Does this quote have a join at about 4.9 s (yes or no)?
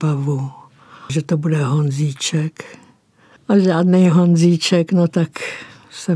no